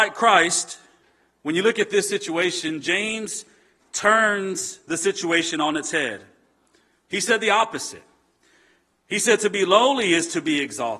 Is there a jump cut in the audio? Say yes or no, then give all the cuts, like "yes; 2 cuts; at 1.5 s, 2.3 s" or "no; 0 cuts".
no; 0 cuts